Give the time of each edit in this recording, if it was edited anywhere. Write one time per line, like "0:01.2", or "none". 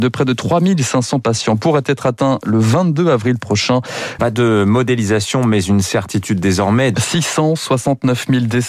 0:04.2
0:06.9